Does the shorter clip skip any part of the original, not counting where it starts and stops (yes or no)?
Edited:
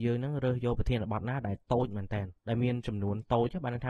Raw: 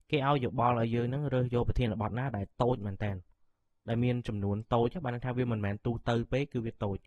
yes